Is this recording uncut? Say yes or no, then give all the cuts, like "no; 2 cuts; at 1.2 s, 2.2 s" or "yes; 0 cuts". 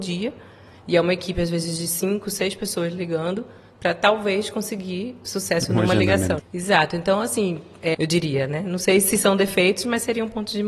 no; 2 cuts; at 6.4 s, 7.9 s